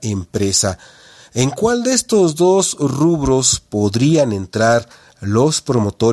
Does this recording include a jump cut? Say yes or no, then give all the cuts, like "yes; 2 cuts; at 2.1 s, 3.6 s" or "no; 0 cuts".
no; 0 cuts